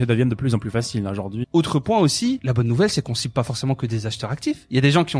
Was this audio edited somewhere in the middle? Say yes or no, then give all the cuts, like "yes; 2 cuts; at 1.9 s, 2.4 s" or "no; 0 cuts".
yes; 1 cut; at 1.4 s